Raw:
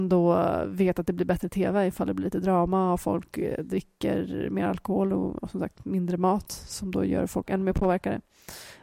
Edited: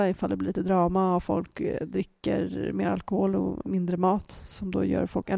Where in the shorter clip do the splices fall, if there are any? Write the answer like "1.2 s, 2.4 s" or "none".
3.6 s